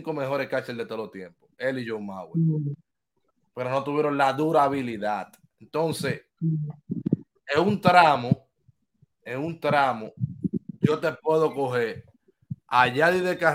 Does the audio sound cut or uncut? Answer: uncut